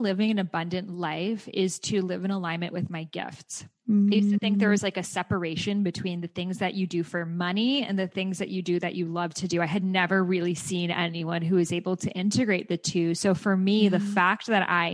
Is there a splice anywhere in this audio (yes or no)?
no